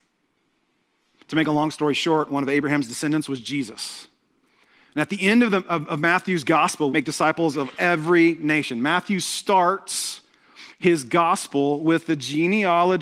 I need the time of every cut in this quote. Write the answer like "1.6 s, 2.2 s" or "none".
6.9 s